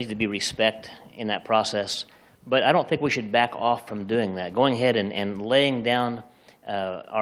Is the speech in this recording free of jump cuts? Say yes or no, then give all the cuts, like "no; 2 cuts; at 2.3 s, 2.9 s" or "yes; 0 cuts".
yes; 0 cuts